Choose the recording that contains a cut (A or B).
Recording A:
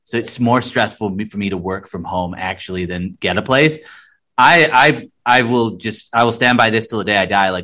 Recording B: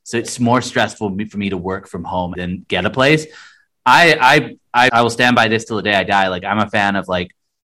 B